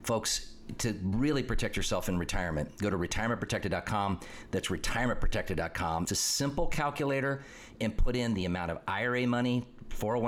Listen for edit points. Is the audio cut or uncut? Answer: cut